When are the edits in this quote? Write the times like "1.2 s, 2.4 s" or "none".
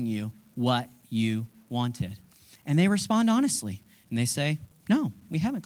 none